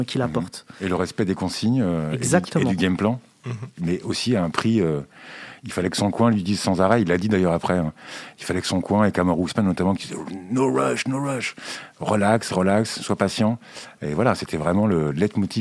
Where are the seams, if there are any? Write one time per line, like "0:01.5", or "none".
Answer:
none